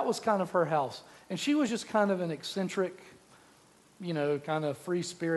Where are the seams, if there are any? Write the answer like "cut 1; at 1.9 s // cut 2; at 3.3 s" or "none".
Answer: none

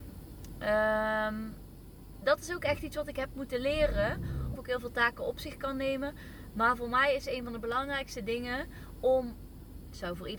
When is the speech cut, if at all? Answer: cut 1; at 4.5 s

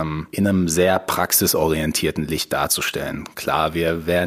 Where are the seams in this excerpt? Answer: none

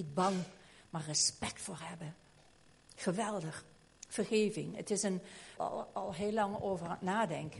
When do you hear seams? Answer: cut 1; at 5.6 s

